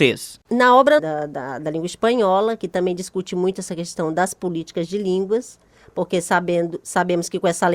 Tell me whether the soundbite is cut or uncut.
cut